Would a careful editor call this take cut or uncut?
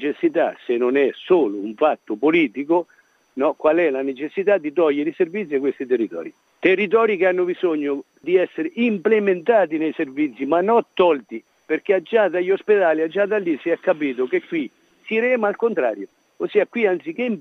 uncut